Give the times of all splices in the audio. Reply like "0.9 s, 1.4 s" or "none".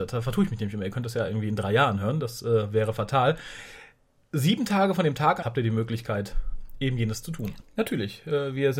5.4 s, 7.6 s